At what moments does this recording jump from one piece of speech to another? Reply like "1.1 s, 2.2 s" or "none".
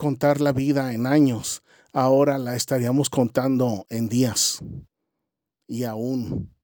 none